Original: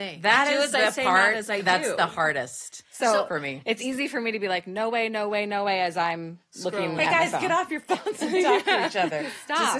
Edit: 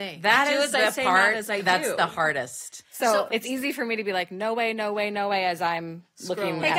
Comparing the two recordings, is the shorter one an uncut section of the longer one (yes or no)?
no